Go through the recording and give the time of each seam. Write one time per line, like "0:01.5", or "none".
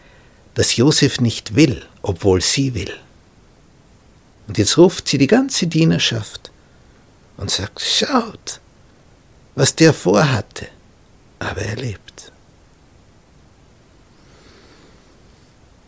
0:11.4